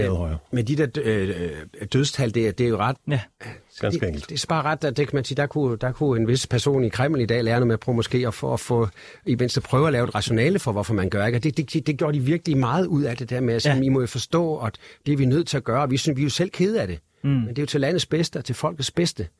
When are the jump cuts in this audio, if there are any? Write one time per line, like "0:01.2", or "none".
0:03.0